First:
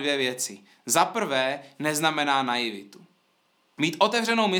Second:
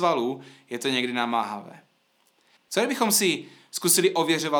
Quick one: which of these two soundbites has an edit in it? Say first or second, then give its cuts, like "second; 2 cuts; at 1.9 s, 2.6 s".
second; 1 cut; at 2.6 s